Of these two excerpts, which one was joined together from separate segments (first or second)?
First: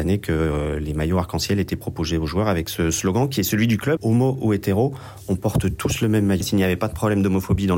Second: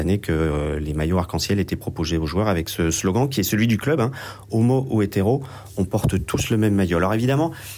first